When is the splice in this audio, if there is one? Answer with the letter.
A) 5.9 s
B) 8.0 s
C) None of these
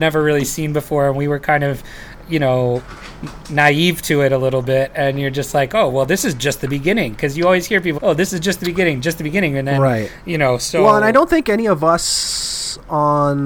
B